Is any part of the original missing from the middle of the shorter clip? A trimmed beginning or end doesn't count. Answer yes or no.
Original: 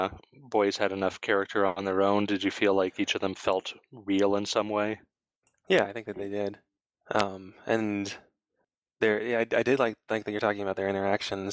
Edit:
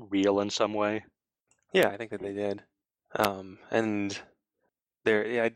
no